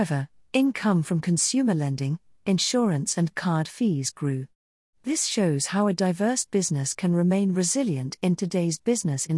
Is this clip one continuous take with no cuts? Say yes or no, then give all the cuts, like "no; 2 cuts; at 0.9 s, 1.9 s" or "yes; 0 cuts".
yes; 0 cuts